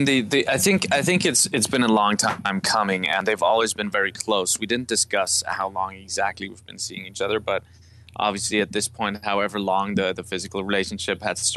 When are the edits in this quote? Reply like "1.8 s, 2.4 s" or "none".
none